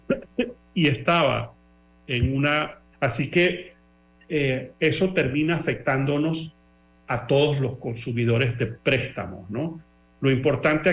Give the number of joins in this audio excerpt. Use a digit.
1